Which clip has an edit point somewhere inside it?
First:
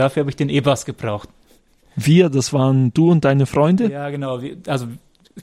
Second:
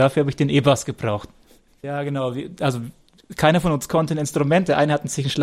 second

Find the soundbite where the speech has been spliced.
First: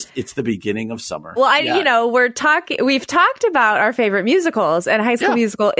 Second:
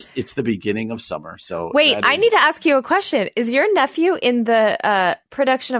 first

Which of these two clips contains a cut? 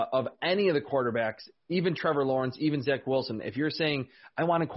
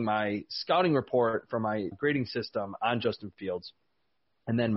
second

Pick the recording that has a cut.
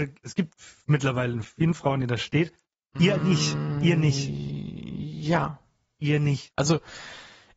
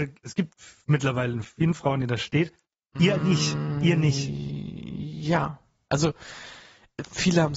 second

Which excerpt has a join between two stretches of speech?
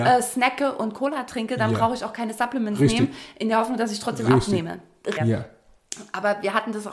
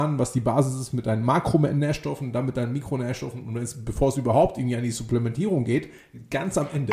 first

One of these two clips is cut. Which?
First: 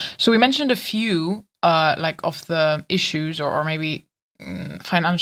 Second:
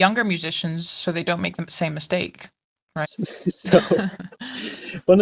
second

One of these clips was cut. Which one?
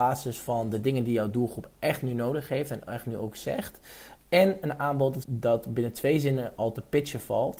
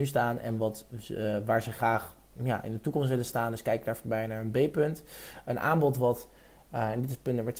first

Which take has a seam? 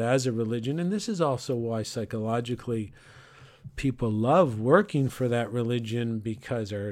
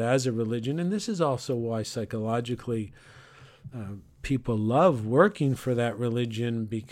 first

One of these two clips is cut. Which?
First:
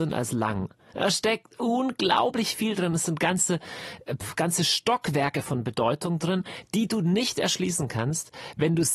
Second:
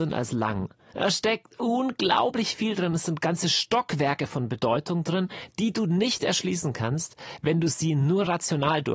second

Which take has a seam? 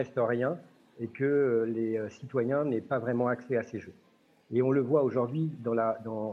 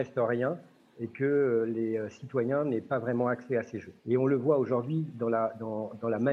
second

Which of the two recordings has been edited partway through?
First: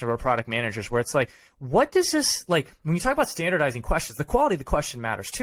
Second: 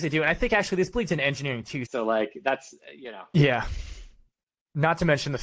second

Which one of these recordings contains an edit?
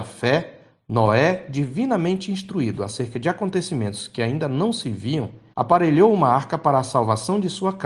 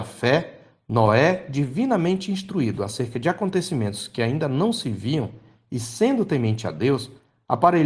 first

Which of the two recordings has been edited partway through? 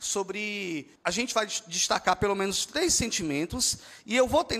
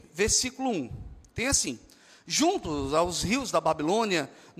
first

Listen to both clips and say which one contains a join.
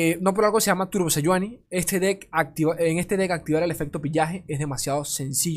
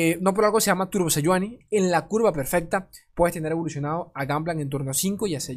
second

